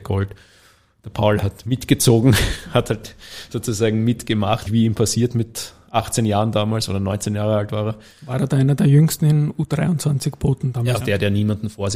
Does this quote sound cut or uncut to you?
cut